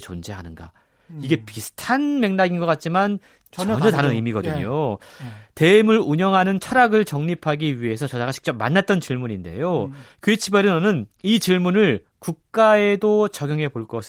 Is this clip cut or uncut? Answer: uncut